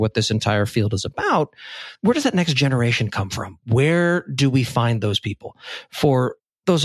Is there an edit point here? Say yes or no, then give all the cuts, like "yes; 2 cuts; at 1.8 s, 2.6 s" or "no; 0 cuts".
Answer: no; 0 cuts